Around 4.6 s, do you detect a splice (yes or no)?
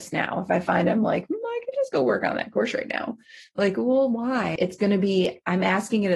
yes